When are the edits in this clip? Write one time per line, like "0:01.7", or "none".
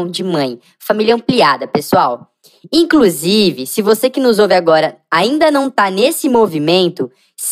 none